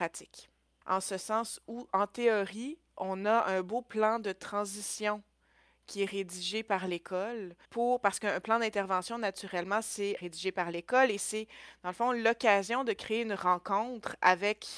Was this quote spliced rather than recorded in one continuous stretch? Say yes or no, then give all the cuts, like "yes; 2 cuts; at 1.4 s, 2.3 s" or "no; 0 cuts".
yes; 2 cuts; at 7.6 s, 10.2 s